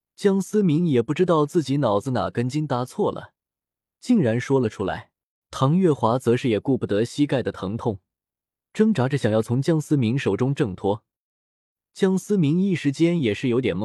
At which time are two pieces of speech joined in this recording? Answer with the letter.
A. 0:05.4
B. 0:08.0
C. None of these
A